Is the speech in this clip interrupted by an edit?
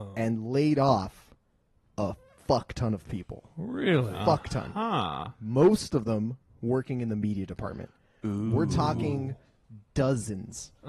no; 0 cuts

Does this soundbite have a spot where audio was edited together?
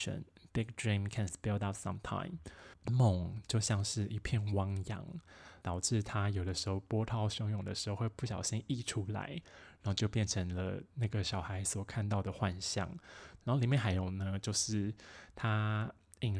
yes; 3 cuts; at 2.7 s, 5.6 s, 13.4 s

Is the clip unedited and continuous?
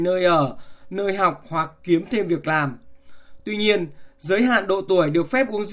yes; 0 cuts

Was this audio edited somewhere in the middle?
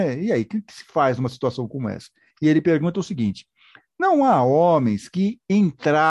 no; 0 cuts

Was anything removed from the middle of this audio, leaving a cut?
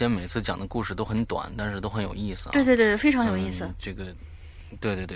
no; 0 cuts

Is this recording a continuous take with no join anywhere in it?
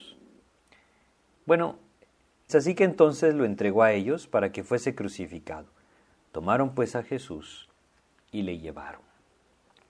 no; 1 cut; at 2.5 s

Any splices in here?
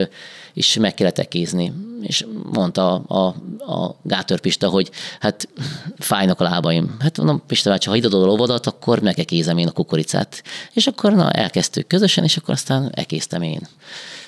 no; 0 cuts

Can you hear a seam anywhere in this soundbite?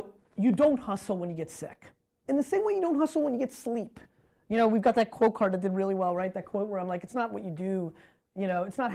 no; 0 cuts

